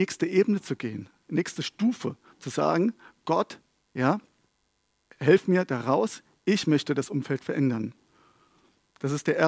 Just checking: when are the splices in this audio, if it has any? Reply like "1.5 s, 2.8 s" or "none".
5.0 s

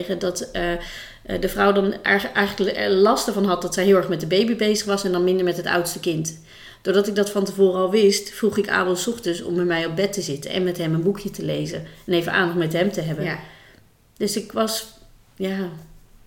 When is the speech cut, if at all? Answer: none

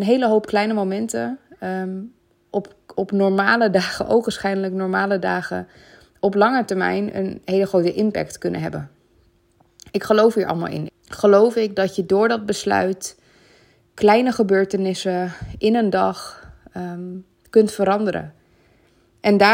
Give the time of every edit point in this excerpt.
10.9 s

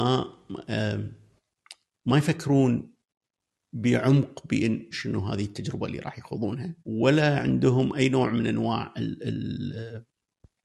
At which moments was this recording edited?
4.9 s, 6.8 s

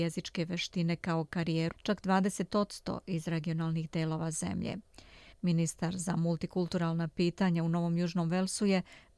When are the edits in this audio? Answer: 1.7 s, 5.3 s

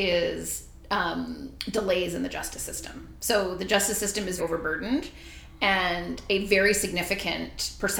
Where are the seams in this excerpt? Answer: 4.4 s

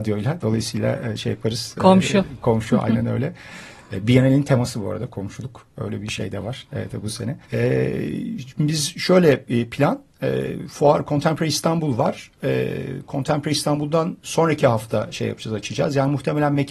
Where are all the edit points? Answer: 7.4 s

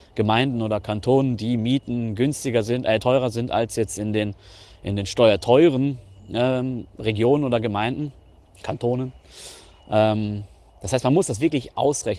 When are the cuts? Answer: none

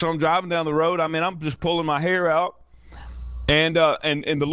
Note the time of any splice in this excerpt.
none

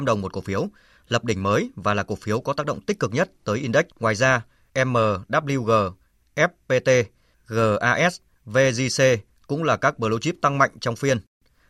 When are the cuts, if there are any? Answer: 3.9 s

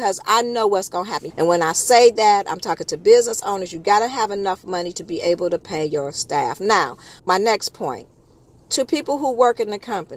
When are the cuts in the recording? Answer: 1.3 s, 7.2 s

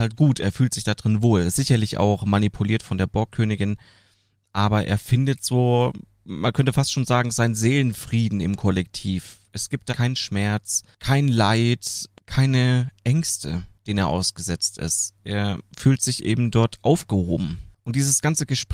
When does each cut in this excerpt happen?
9.9 s

